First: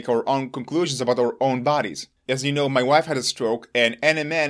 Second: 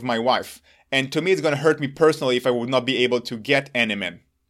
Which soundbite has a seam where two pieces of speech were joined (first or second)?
first